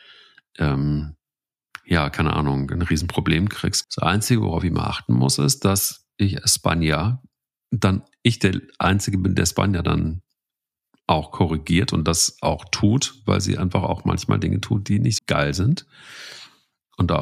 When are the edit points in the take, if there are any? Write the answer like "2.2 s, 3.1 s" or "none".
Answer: 3.8 s, 15.2 s